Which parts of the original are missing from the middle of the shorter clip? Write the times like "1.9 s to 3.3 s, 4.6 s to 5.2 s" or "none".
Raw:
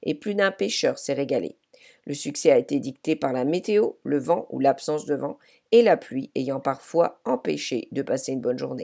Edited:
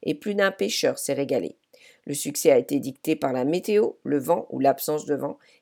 none